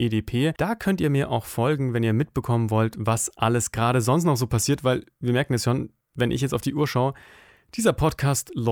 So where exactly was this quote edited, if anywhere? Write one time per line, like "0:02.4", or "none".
none